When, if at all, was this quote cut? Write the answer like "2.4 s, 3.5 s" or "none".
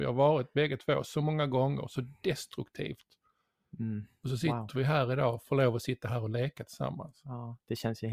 none